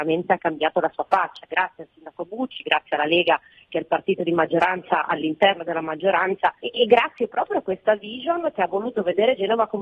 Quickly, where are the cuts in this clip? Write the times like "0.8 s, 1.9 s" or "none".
6.6 s